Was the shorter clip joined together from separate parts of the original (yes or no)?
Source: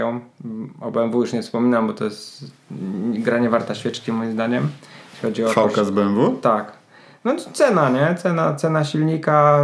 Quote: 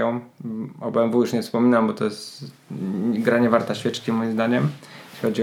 no